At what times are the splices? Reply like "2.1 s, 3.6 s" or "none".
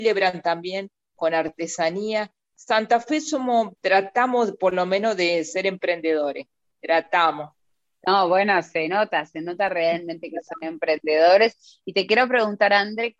3.8 s